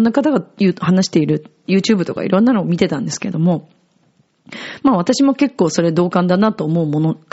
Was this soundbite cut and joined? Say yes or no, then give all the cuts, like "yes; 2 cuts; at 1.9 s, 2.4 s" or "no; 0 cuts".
no; 0 cuts